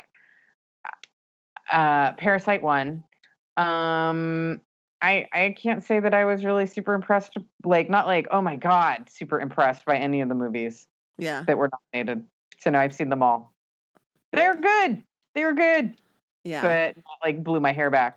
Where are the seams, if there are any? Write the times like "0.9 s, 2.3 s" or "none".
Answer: none